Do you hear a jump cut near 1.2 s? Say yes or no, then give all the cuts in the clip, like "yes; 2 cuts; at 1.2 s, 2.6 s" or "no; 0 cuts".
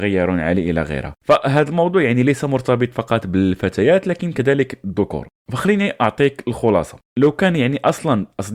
yes; 1 cut; at 1.2 s